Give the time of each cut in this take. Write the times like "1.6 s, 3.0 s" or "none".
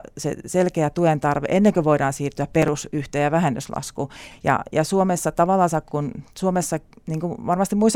4.3 s